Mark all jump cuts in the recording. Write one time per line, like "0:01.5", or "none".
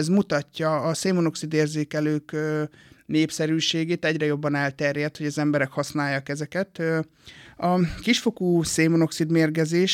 0:07.5